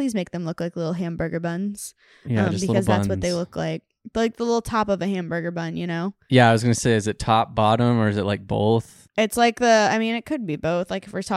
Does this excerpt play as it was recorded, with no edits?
yes; 0 cuts

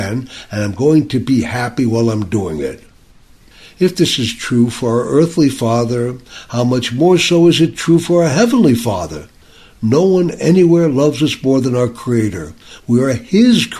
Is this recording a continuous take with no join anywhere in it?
yes; 0 cuts

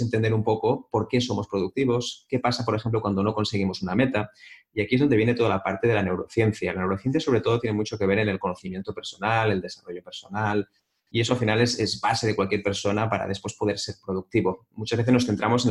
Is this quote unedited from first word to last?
yes; 0 cuts

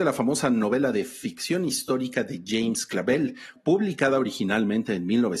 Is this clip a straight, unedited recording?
yes; 0 cuts

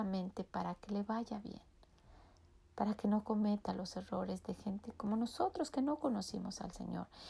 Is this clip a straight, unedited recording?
yes; 0 cuts

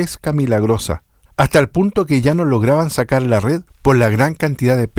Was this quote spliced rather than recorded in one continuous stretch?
yes; 1 cut; at 1.3 s

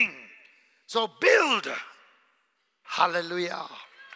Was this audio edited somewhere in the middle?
yes; 1 cut; at 2.8 s

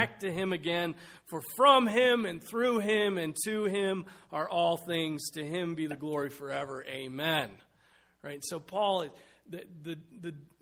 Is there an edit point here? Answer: no; 0 cuts

